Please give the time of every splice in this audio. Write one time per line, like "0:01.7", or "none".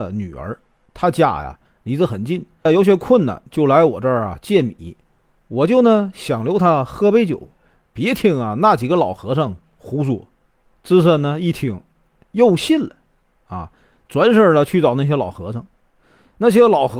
0:02.7